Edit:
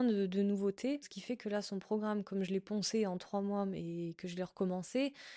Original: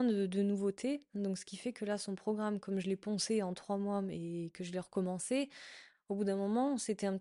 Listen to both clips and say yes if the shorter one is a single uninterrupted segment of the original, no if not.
no